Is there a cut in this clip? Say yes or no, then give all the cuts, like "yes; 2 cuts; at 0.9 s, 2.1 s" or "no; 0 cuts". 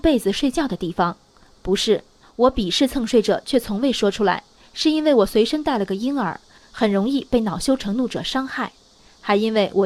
no; 0 cuts